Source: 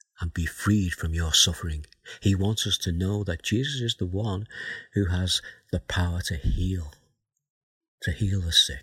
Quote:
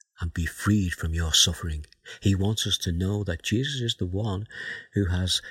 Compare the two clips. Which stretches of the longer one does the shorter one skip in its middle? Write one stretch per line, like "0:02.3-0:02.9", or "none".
none